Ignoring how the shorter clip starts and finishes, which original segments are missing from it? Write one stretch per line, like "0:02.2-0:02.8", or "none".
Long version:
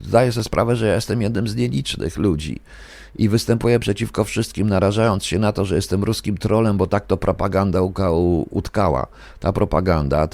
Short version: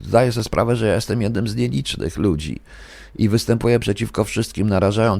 none